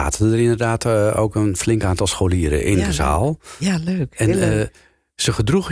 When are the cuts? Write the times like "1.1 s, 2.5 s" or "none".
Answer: none